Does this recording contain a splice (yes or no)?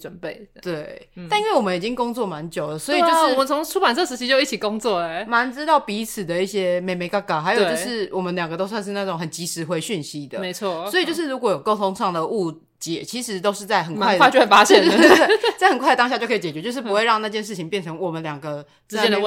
no